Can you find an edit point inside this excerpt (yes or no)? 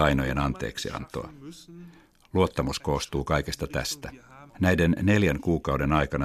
yes